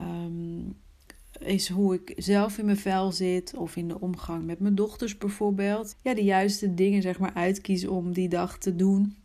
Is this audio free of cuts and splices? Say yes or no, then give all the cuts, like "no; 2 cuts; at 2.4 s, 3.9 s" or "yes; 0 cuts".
no; 1 cut; at 5.9 s